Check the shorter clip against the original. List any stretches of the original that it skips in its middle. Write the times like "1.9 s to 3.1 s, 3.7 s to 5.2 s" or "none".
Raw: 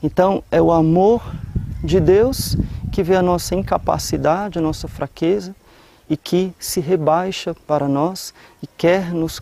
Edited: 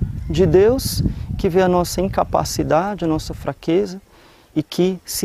none